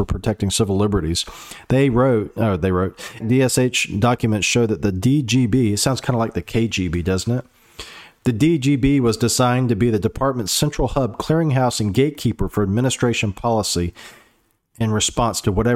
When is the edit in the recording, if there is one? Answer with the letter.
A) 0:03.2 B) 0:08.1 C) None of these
A